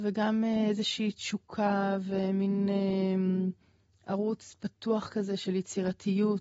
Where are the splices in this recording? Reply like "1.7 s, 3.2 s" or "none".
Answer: none